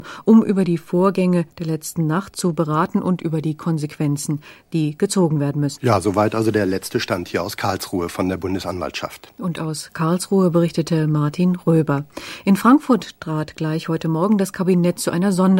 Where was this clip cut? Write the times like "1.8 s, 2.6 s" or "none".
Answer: 5.8 s